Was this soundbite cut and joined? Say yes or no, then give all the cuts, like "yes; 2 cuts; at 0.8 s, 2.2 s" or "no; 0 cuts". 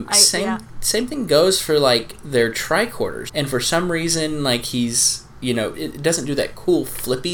yes; 2 cuts; at 3.3 s, 5.7 s